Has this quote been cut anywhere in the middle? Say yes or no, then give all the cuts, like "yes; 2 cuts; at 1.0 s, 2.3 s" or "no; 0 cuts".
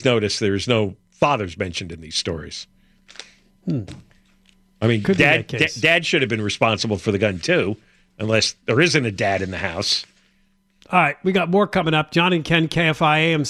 no; 0 cuts